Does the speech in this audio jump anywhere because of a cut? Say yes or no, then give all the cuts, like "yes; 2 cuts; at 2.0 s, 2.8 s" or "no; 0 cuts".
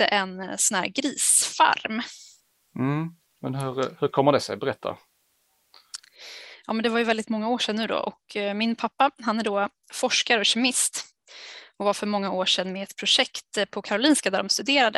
no; 0 cuts